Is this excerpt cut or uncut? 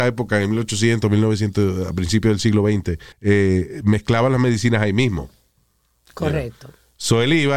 cut